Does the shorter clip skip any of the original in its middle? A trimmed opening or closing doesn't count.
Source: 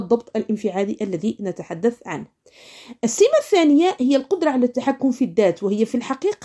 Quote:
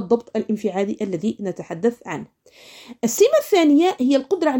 no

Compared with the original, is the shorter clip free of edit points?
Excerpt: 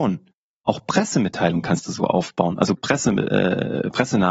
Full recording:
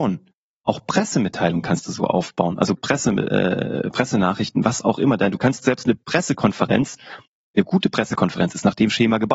yes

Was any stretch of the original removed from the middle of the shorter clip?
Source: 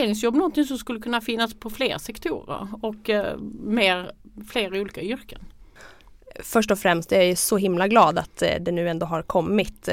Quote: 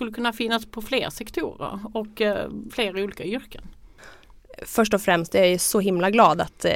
yes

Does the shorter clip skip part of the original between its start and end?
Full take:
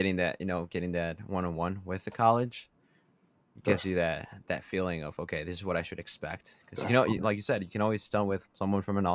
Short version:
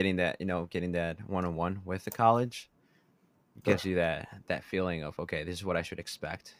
no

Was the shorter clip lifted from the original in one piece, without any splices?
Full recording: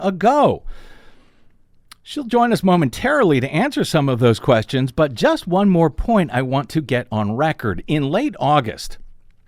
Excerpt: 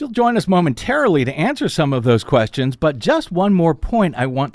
yes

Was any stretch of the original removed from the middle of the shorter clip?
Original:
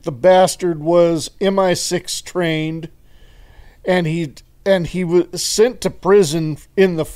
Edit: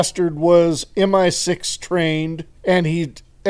yes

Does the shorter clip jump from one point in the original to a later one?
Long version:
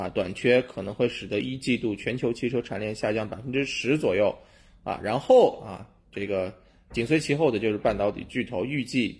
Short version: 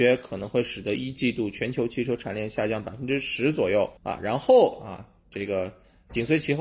yes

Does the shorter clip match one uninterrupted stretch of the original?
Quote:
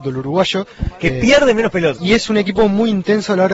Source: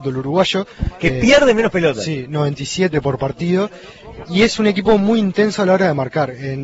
no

